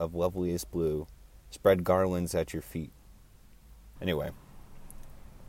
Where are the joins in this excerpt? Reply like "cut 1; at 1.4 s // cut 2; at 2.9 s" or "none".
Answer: cut 1; at 4.0 s